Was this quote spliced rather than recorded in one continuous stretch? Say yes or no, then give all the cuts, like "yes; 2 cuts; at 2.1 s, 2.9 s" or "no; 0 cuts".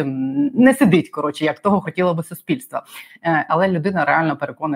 yes; 1 cut; at 3.5 s